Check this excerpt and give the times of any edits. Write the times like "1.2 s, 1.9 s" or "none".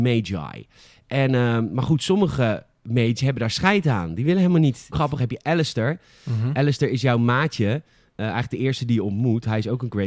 4.9 s